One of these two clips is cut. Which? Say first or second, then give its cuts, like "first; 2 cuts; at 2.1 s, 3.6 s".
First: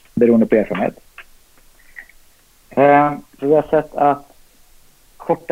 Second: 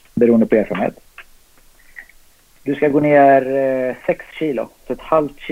second; 1 cut; at 2.5 s